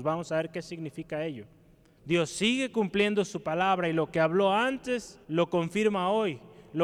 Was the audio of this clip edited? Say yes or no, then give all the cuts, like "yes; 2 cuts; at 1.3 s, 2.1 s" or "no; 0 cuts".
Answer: yes; 2 cuts; at 2.0 s, 5.2 s